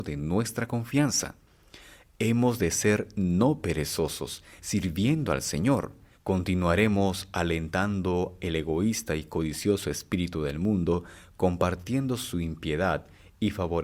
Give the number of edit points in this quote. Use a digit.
2